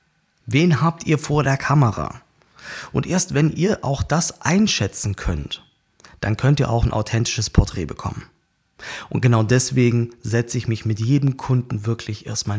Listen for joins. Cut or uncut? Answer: uncut